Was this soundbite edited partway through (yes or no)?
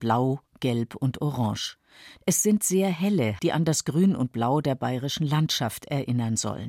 yes